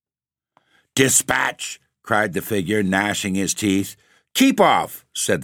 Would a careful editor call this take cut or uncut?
uncut